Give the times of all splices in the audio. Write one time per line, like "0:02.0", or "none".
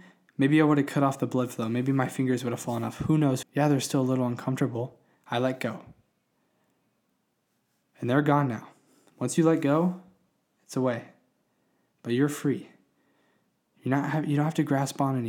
0:03.4
0:05.1